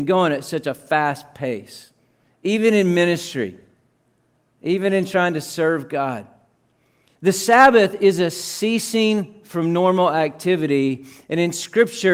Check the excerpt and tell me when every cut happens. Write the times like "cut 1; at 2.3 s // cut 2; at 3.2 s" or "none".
cut 1; at 7.1 s